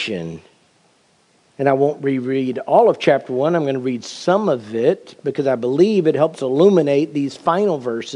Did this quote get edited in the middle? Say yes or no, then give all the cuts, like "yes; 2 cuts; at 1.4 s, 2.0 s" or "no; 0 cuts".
no; 0 cuts